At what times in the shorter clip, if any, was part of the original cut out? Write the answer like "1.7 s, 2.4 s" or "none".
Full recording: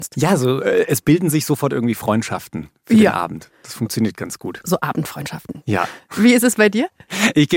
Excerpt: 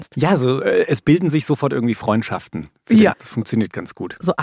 3.1 s